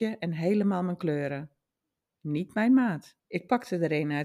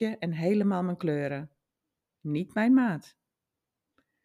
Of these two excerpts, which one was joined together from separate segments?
first; 1 cut; at 3.2 s

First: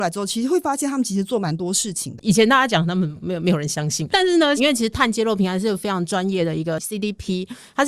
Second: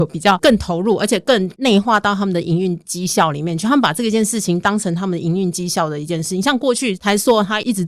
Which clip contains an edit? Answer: first; 1 cut; at 4.6 s

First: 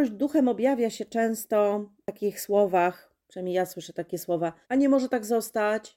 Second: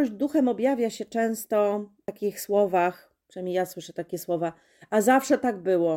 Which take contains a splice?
first; 1 cut; at 4.6 s

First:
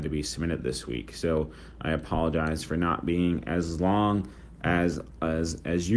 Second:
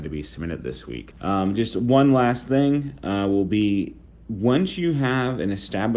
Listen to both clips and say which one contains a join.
second; 1 cut; at 1.1 s

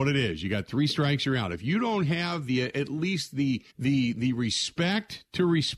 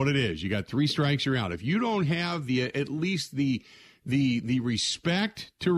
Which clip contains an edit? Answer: first; 1 cut; at 3.7 s

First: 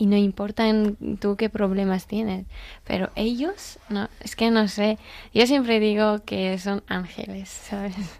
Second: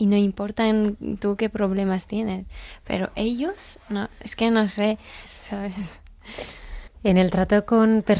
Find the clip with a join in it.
second; 2 cuts; at 5.3 s, 6.9 s

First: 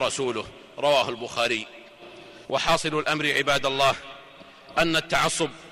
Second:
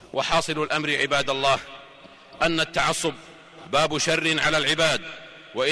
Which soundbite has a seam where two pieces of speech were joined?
first; 1 cut; at 2.4 s

